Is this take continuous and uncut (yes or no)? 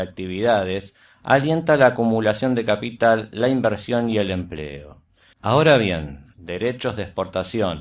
no